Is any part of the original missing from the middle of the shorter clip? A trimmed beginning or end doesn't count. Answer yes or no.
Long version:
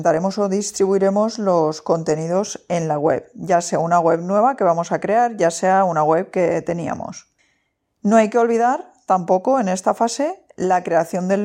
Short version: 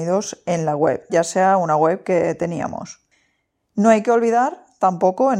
yes